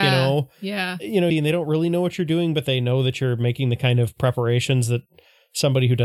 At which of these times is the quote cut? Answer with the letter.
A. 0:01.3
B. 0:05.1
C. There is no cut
A